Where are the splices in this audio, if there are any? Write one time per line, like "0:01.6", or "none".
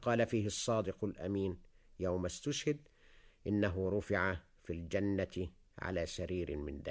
none